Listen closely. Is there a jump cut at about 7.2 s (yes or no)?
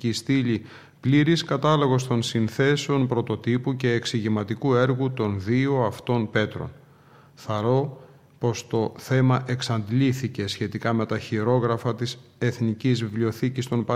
no